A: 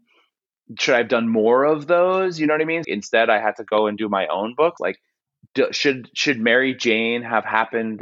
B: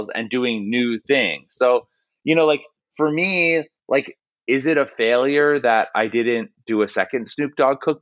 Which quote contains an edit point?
A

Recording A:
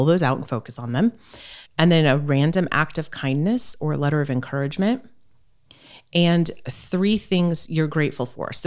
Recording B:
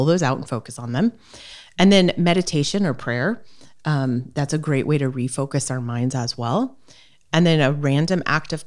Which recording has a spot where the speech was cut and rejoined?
A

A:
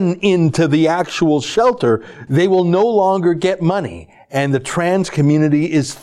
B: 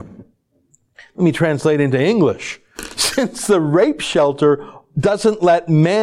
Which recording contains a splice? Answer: A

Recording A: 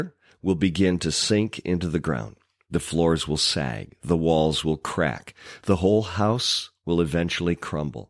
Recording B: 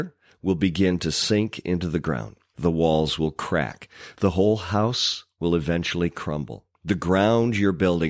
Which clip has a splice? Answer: B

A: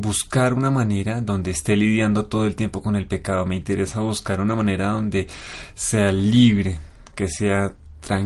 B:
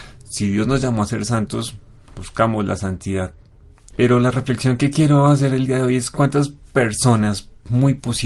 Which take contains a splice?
B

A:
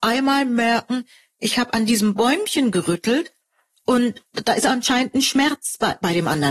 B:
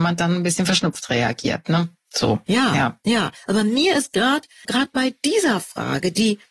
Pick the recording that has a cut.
B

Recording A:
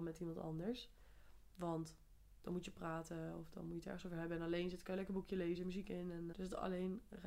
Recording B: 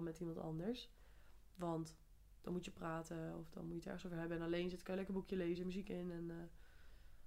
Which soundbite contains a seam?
A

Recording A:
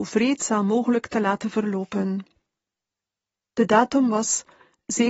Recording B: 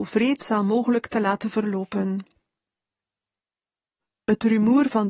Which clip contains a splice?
A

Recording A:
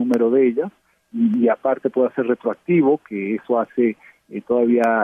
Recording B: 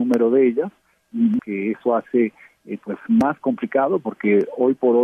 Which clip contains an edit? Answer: B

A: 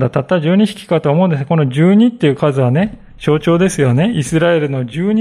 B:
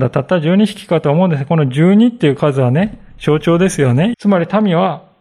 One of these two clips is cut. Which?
B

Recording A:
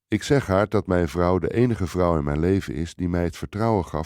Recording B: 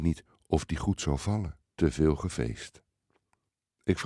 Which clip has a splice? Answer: B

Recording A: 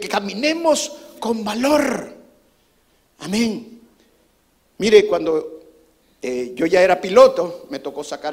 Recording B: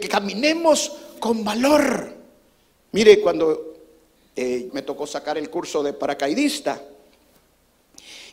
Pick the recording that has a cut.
B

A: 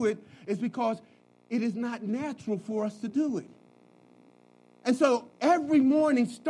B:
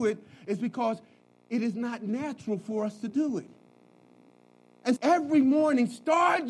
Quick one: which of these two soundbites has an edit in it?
B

